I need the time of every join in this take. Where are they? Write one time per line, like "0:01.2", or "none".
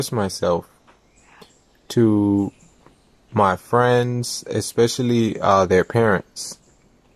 none